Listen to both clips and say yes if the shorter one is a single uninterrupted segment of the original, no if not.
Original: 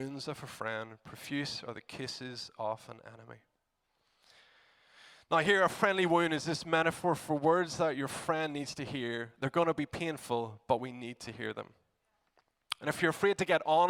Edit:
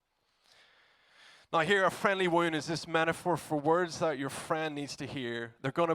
yes